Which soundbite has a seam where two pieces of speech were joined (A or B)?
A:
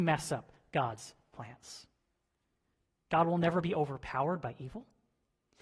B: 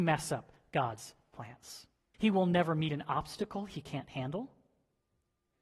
B